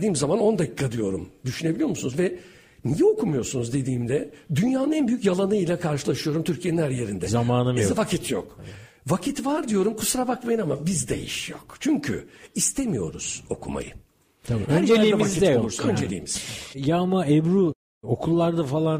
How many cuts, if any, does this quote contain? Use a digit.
0